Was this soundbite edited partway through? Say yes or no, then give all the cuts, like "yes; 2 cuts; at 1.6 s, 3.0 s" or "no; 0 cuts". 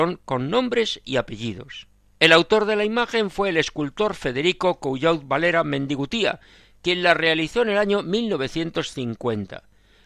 yes; 1 cut; at 2.1 s